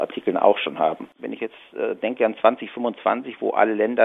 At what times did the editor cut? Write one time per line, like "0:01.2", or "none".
0:01.2